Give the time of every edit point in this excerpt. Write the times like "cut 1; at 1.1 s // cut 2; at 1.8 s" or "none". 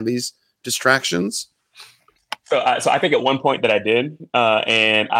none